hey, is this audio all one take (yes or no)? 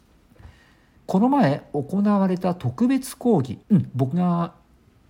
no